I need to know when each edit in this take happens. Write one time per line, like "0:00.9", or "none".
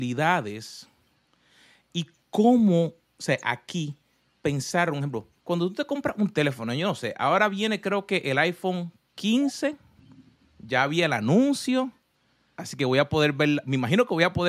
0:05.4
0:12.6